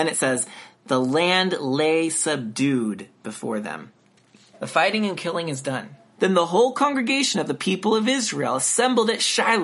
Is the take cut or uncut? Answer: cut